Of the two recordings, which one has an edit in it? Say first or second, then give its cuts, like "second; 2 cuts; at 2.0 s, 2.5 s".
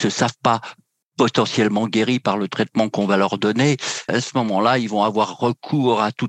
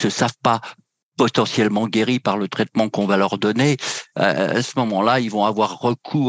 first; 1 cut; at 4.1 s